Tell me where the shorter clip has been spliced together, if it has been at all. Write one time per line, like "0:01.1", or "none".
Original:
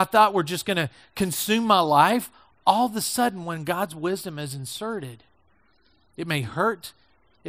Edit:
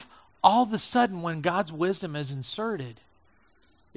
none